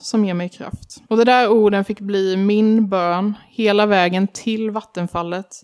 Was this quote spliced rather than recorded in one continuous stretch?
yes; 1 cut; at 1.1 s

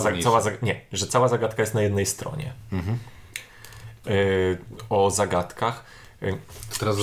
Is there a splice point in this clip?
yes; 1 cut; at 4.0 s

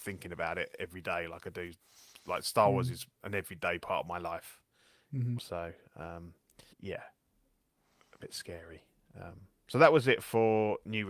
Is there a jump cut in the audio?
yes; 2 cuts; at 5.4 s, 6.7 s

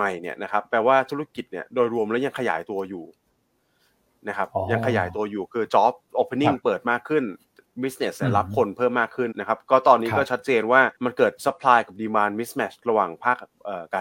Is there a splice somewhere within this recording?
yes; 2 cuts; at 9.3 s, 11.0 s

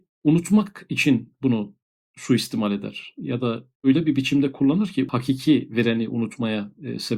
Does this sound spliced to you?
no; 0 cuts

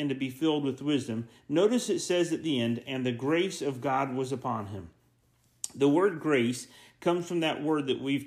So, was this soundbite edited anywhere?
no; 0 cuts

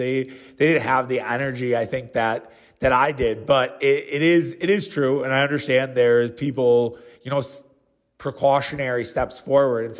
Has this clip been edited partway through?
no; 0 cuts

